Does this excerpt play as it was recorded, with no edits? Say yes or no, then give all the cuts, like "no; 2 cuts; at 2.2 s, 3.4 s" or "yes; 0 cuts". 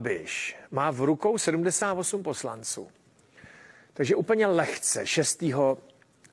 yes; 0 cuts